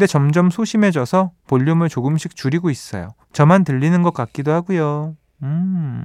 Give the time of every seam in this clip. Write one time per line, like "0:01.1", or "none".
0:03.2